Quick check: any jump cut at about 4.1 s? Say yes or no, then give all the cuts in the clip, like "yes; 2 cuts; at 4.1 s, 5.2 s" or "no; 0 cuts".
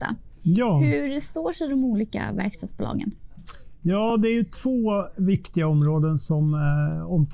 no; 0 cuts